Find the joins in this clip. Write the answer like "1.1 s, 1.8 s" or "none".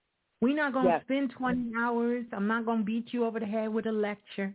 none